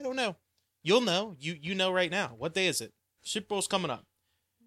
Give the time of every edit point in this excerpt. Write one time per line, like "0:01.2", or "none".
0:03.2